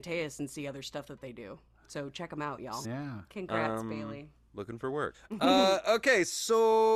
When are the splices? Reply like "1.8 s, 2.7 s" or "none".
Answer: 2.8 s, 5.1 s